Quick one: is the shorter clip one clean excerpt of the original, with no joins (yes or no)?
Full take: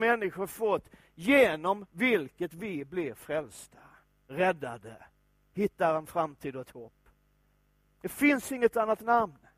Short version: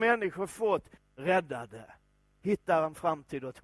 no